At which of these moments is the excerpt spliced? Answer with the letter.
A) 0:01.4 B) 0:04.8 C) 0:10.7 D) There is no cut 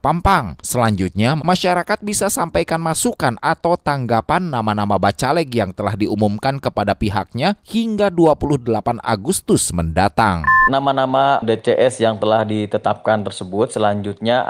A